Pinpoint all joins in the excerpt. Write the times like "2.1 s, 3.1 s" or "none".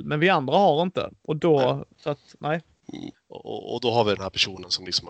1.9 s, 3.1 s